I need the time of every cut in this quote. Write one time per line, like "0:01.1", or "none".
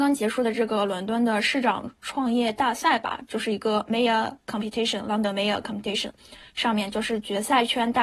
none